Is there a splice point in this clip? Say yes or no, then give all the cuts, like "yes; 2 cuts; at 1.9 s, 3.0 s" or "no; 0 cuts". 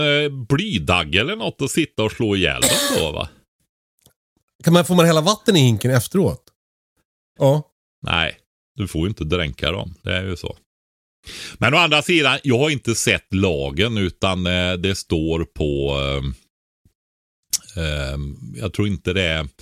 yes; 1 cut; at 7.4 s